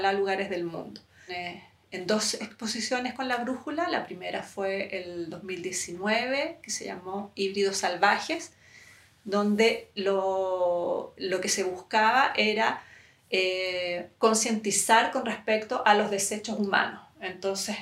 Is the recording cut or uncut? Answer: cut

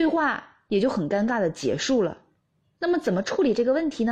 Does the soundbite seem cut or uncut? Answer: uncut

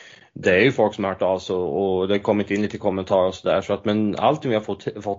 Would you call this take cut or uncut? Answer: uncut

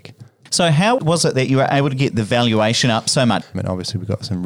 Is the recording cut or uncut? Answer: cut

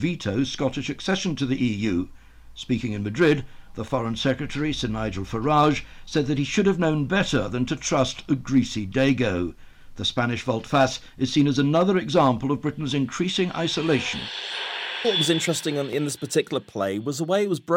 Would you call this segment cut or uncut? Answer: cut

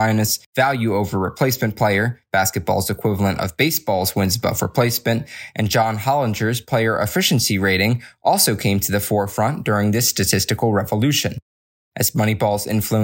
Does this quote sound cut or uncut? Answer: uncut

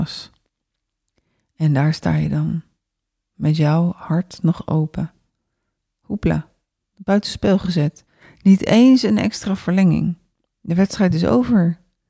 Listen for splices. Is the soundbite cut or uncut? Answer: cut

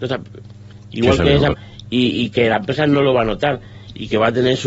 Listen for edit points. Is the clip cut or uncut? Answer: cut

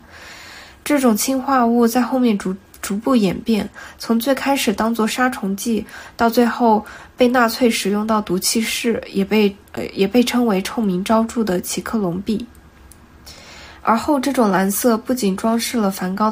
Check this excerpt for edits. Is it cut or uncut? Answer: cut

